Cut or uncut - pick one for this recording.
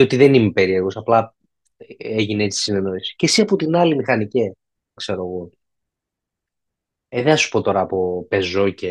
cut